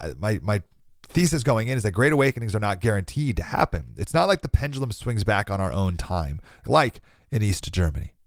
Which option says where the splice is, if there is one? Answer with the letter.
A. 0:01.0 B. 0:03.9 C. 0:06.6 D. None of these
C